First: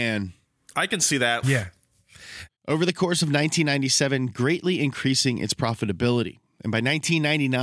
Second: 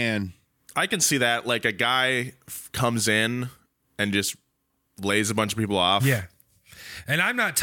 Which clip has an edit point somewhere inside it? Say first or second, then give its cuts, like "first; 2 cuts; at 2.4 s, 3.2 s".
first; 3 cuts; at 1.4 s, 2.5 s, 4.3 s